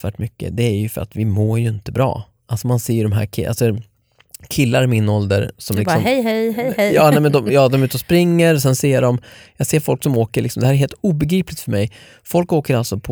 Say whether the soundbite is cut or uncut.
uncut